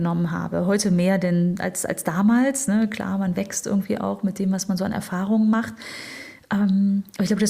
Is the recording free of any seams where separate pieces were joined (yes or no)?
yes